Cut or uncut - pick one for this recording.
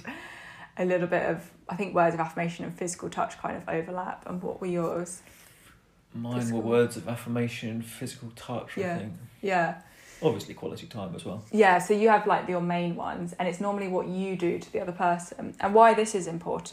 uncut